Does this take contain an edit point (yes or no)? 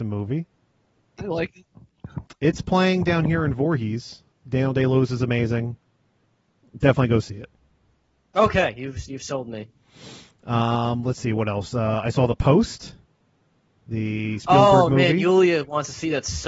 yes